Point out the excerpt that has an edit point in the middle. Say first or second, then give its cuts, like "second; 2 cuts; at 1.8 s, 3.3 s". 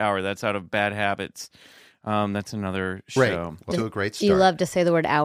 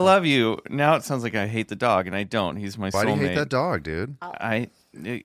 first; 1 cut; at 3.7 s